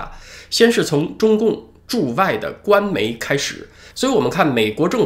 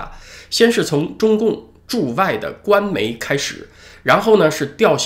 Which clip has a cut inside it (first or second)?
first